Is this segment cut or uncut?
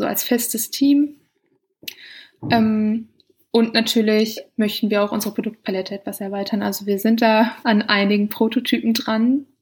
cut